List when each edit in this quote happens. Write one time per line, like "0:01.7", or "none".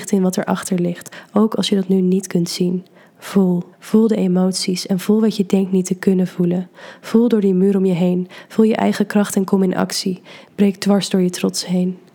0:03.7